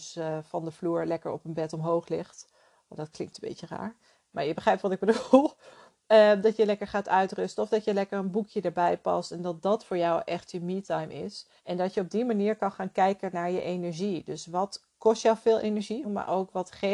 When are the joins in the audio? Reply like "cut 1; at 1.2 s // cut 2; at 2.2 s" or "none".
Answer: cut 1; at 11.6 s // cut 2; at 16.0 s